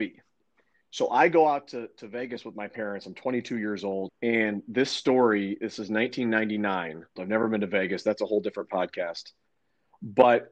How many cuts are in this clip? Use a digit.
2